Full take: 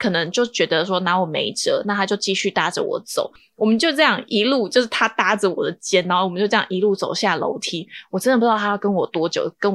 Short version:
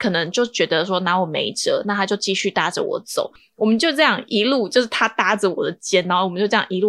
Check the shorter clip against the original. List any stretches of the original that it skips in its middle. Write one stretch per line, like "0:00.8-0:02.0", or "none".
none